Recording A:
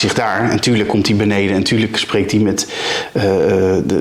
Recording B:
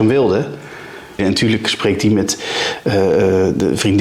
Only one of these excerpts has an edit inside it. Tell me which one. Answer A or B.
B